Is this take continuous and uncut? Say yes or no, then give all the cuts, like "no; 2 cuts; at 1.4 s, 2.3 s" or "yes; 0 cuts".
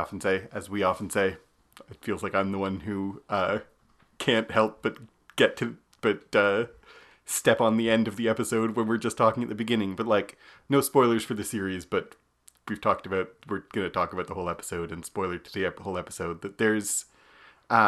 yes; 0 cuts